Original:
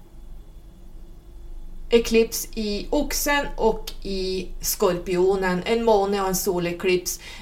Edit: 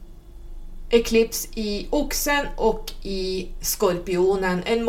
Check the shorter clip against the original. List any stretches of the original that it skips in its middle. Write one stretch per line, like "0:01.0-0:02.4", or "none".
none